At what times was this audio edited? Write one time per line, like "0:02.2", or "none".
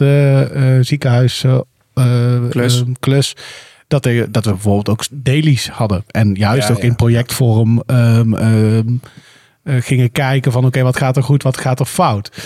none